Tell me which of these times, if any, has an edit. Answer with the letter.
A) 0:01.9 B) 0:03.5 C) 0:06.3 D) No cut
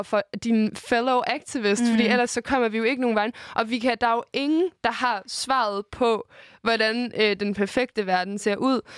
D